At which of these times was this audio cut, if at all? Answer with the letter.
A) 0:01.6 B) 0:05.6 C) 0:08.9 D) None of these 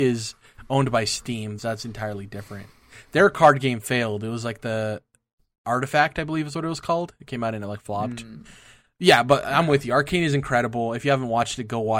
A